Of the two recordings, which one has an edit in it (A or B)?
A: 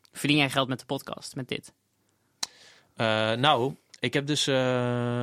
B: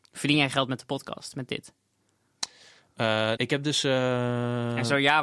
B